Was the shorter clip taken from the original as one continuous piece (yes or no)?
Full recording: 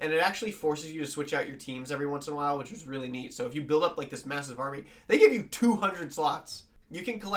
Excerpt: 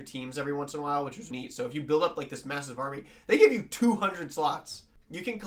no